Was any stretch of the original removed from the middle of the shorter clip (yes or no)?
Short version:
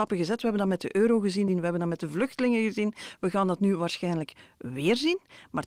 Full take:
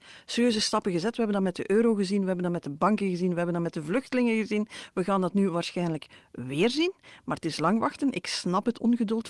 yes